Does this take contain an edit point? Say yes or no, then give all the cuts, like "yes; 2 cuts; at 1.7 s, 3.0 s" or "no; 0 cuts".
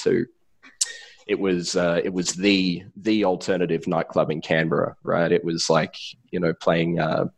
no; 0 cuts